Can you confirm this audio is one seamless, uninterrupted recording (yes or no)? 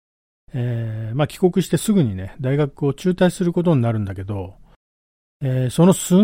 yes